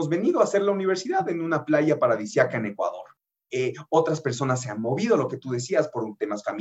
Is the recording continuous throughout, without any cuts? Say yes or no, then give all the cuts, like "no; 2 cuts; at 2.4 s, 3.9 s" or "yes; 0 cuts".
yes; 0 cuts